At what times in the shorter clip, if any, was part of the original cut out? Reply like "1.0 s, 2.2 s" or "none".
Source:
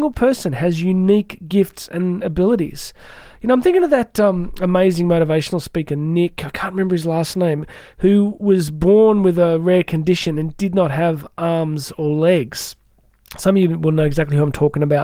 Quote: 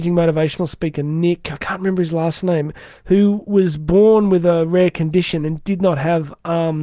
none